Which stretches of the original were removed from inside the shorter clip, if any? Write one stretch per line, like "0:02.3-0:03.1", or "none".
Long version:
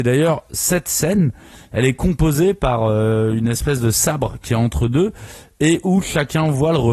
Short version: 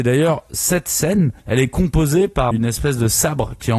0:01.4-0:01.6
0:02.8-0:03.3